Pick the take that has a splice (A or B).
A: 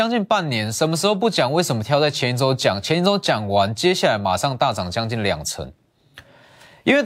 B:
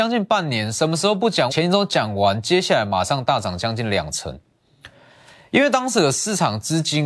B